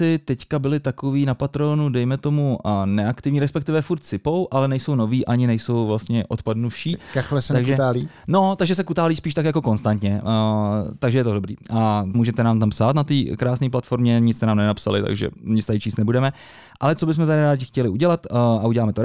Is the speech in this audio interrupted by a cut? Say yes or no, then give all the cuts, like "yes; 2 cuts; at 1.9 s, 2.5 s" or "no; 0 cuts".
yes; 1 cut; at 12.1 s